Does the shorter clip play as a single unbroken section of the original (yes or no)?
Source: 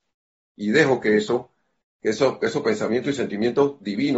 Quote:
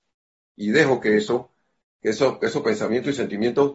yes